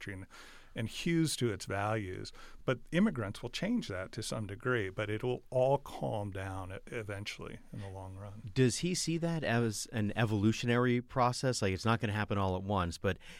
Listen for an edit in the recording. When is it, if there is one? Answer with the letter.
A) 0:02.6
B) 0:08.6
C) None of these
C